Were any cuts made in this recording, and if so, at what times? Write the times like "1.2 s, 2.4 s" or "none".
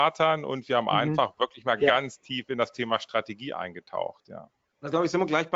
none